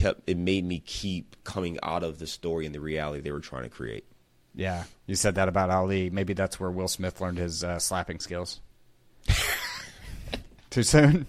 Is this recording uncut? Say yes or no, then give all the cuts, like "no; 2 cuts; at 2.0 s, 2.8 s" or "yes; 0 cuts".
yes; 0 cuts